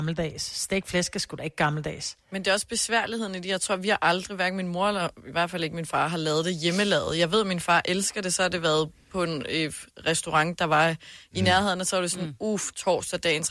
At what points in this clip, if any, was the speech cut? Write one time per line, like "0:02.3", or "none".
0:02.2